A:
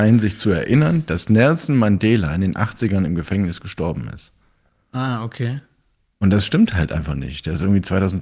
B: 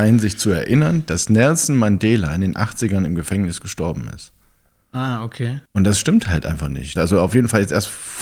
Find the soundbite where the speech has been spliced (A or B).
B